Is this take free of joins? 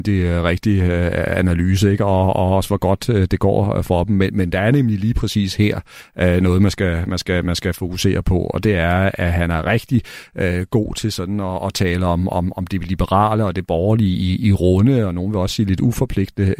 no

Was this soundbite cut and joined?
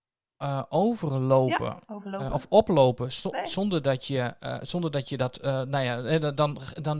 no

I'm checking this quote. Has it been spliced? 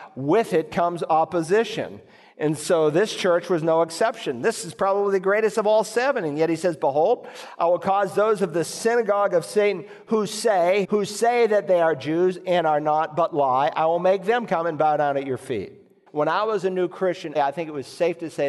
yes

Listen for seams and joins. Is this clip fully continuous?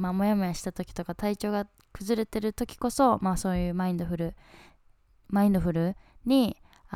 yes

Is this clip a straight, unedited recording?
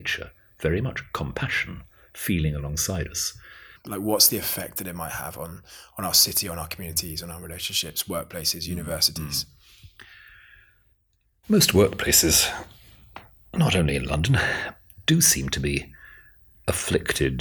no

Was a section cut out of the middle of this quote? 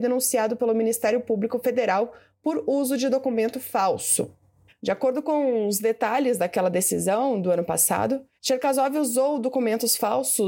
yes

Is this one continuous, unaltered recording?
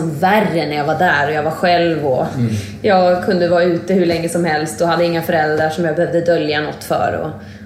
yes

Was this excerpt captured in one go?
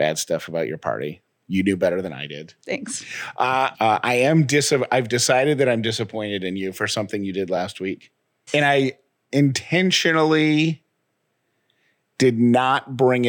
no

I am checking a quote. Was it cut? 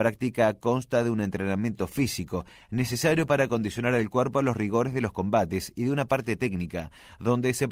no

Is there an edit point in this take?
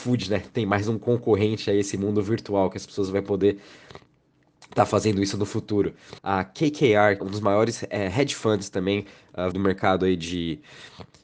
yes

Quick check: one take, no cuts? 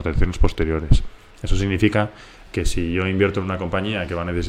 yes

